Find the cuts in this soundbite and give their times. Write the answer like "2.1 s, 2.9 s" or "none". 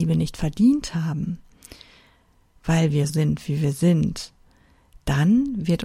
3.1 s